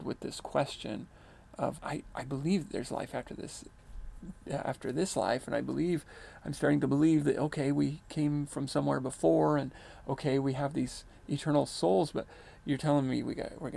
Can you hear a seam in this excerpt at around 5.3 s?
no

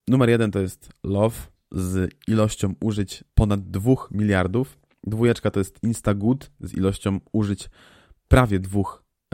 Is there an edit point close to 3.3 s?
yes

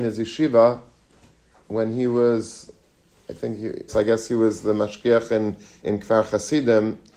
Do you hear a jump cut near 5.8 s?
yes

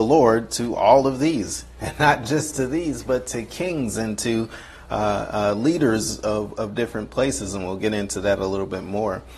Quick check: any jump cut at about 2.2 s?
no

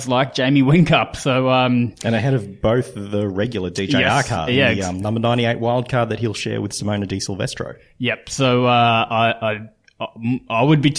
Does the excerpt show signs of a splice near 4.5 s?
yes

